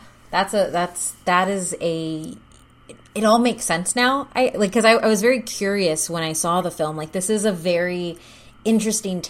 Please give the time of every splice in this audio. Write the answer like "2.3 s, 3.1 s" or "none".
4.5 s